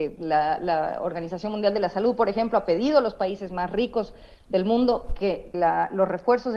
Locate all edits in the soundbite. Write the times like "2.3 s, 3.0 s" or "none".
5.5 s